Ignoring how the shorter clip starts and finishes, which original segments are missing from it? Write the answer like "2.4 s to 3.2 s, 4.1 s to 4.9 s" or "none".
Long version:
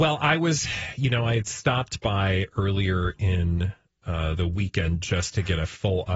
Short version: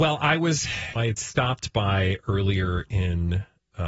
1.0 s to 1.2 s